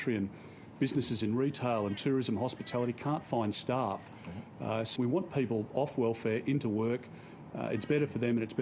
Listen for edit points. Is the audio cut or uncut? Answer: cut